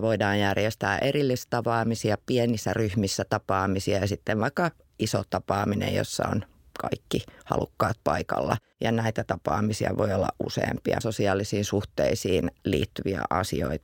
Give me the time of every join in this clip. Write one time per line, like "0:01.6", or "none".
0:08.7
0:11.0